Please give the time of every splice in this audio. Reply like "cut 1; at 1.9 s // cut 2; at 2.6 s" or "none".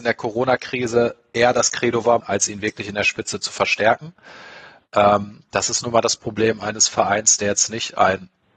cut 1; at 2.2 s